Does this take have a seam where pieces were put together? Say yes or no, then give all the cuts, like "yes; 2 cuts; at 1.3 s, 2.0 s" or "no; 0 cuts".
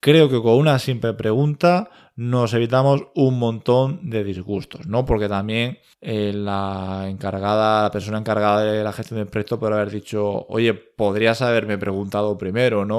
no; 0 cuts